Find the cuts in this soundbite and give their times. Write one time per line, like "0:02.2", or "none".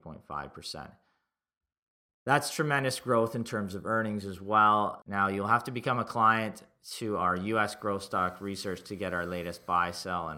0:05.0